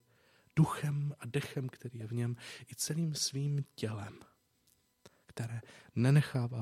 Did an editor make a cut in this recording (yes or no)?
no